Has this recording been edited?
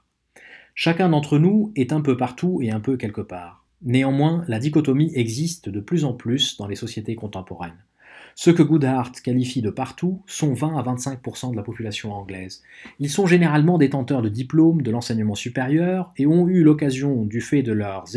no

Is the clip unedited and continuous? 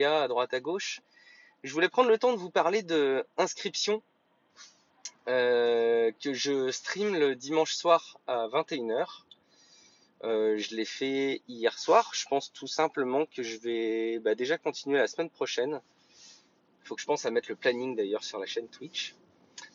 yes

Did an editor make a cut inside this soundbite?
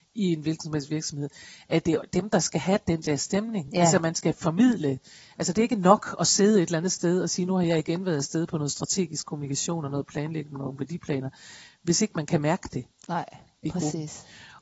no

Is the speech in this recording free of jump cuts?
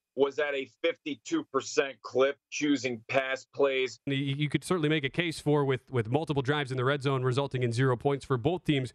no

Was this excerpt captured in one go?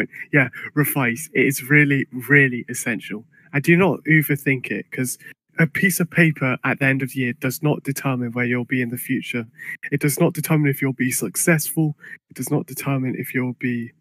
yes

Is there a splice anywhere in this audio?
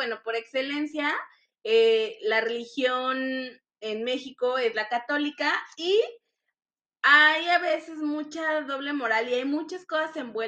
no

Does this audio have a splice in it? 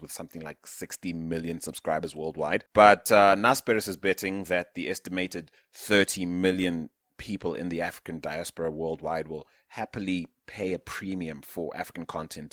no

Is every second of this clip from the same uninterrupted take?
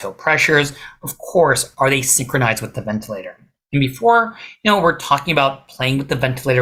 yes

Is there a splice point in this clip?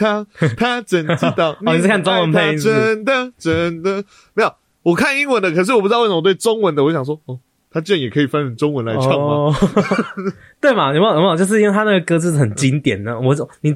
no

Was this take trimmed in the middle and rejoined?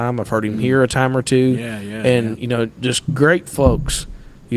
no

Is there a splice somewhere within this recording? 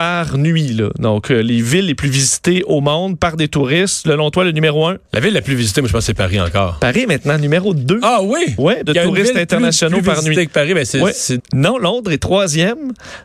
yes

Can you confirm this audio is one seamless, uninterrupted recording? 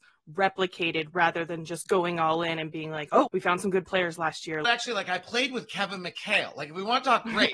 no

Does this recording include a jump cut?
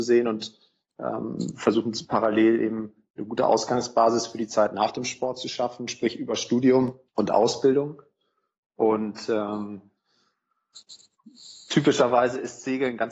yes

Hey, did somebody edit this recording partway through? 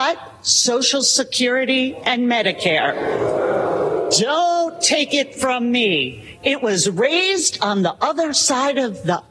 no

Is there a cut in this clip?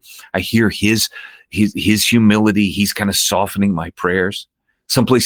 no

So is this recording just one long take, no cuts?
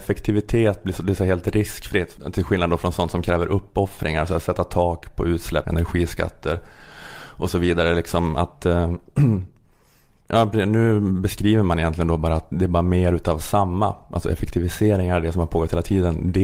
no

